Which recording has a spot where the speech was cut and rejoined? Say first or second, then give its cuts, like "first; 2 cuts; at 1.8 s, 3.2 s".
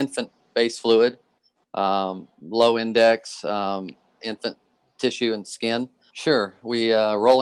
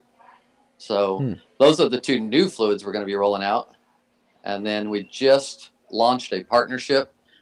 first; 2 cuts; at 4.2 s, 6.1 s